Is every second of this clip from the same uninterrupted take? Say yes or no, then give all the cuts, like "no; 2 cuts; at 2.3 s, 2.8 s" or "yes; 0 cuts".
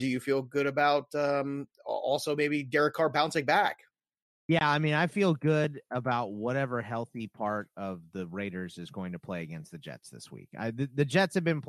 yes; 0 cuts